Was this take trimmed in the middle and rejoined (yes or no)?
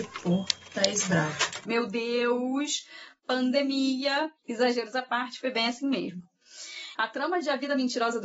yes